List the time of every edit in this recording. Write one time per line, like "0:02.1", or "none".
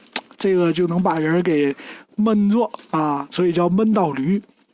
0:03.3